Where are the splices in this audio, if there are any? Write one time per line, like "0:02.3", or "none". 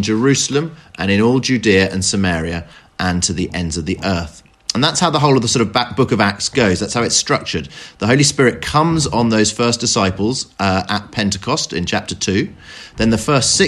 none